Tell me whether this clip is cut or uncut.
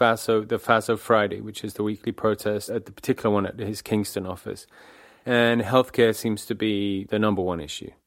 uncut